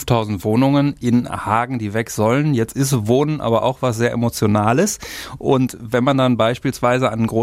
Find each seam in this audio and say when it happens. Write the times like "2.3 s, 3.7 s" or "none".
none